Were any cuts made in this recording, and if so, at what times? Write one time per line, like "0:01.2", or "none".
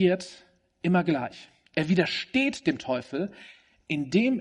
none